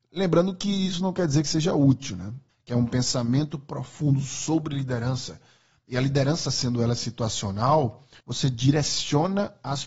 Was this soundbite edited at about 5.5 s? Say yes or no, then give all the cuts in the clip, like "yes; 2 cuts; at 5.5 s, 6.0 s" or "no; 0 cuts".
no; 2 cuts; at 2.5 s, 8.2 s